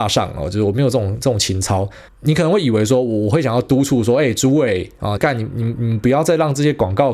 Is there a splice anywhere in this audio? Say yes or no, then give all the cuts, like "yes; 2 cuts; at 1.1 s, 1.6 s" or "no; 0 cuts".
yes; 2 cuts; at 2.1 s, 5.2 s